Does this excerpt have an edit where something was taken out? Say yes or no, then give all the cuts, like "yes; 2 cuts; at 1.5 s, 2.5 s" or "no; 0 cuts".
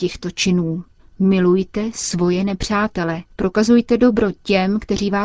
yes; 2 cuts; at 1.0 s, 3.3 s